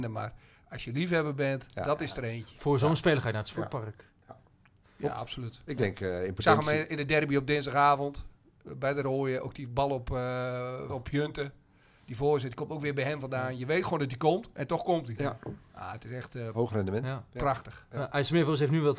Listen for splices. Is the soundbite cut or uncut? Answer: cut